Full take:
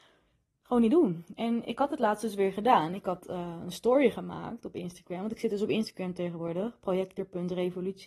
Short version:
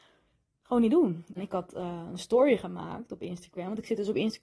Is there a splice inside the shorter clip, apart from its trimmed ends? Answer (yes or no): yes